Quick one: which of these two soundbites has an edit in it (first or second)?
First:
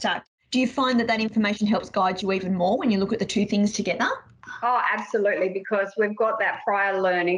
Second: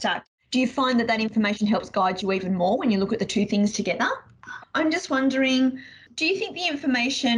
second